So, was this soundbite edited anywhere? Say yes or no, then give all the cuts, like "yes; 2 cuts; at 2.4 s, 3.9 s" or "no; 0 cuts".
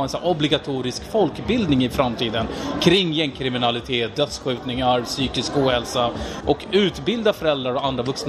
yes; 1 cut; at 6.4 s